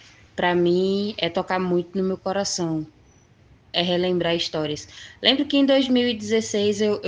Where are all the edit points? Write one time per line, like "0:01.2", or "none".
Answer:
0:03.7